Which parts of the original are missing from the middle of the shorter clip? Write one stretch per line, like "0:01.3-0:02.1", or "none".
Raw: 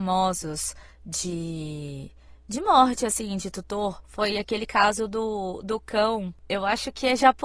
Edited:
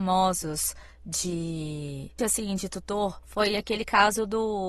0:02.2-0:03.0